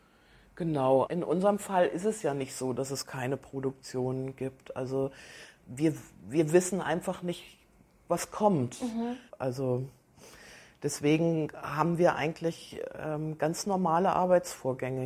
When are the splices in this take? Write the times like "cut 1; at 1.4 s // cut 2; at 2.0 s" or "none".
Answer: cut 1; at 1.0 s // cut 2; at 9.3 s